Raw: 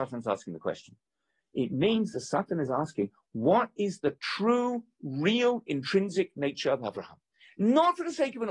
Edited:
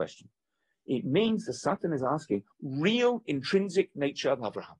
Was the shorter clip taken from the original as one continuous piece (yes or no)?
no